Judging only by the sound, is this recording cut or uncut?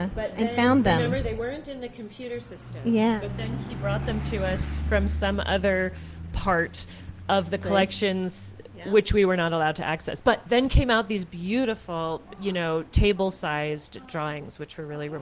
uncut